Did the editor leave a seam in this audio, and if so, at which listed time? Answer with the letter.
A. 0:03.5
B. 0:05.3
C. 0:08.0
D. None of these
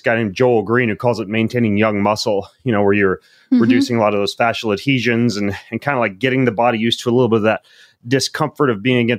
D